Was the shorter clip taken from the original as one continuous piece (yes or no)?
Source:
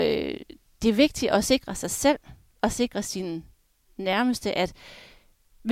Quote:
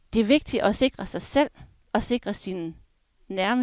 yes